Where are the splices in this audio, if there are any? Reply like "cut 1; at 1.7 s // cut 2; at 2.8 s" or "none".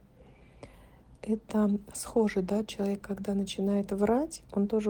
cut 1; at 1.2 s